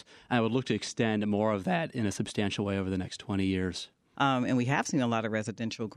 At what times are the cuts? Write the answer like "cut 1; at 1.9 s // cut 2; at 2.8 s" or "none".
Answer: cut 1; at 4.1 s